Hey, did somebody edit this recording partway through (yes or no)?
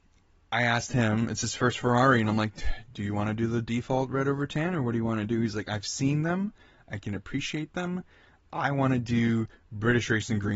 no